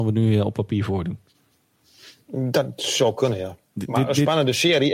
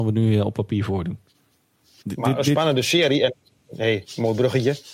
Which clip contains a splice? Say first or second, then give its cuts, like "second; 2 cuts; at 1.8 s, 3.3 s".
second; 1 cut; at 2.0 s